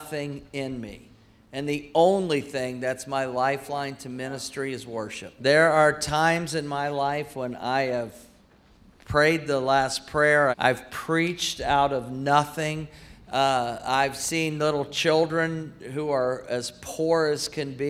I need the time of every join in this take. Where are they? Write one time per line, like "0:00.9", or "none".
0:05.4
0:10.5